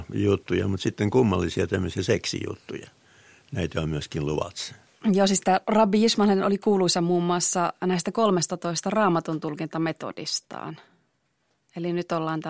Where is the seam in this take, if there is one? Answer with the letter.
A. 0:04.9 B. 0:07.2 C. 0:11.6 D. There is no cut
A